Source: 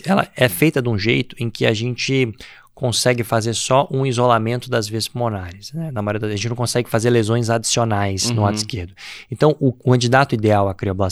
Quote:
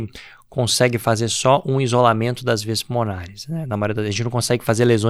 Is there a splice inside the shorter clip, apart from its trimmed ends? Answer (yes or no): no